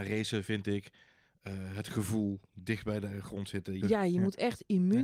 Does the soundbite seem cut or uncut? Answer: cut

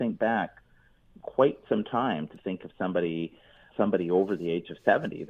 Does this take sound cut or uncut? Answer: cut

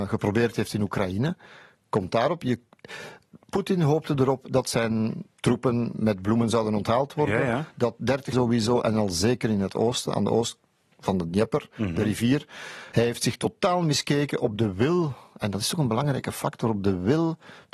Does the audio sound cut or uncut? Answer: cut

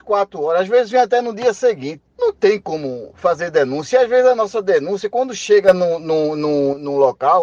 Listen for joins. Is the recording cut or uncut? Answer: uncut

